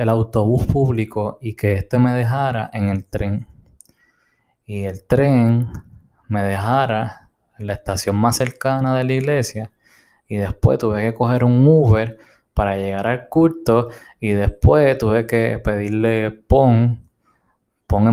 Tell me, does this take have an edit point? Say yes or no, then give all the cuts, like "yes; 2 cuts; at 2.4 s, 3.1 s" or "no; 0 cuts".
no; 0 cuts